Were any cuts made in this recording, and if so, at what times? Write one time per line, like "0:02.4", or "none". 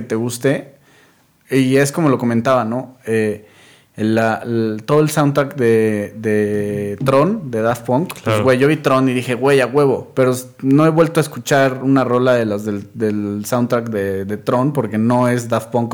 none